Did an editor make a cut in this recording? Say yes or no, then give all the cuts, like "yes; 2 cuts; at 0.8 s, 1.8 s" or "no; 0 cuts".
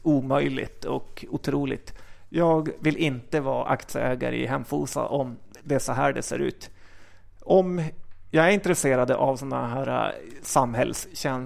no; 0 cuts